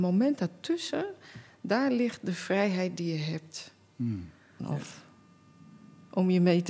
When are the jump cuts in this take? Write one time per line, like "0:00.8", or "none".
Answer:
0:04.6